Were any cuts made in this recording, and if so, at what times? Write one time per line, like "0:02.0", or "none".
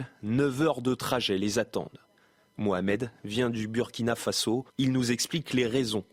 0:04.7